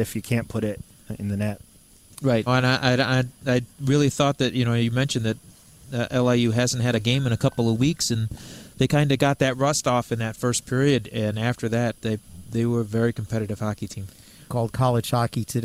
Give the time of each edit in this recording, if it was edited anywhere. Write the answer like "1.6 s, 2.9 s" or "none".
2.5 s, 12.0 s, 14.5 s